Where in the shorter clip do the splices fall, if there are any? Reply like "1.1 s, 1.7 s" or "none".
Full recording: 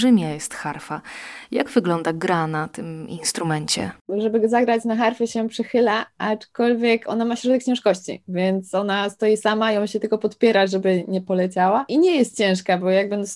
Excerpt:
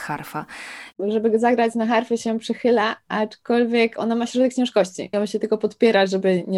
0.9 s, 5.1 s